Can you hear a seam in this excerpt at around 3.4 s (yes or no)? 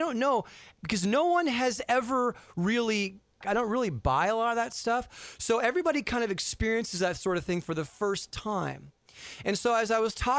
yes